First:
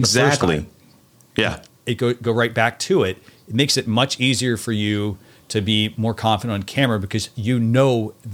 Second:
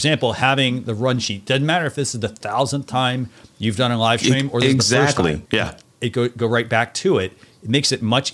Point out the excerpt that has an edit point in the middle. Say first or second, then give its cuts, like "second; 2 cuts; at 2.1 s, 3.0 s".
second; 1 cut; at 5.5 s